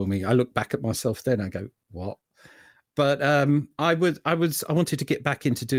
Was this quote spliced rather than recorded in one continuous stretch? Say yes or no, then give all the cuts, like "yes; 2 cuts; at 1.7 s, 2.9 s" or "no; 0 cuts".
no; 0 cuts